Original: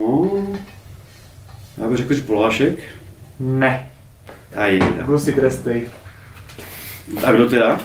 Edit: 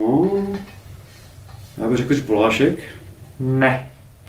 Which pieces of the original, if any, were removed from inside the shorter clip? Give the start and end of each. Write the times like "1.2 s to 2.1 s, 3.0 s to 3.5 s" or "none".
none